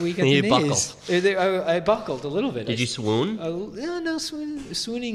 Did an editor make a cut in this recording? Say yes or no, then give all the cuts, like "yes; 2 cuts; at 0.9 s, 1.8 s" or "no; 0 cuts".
no; 0 cuts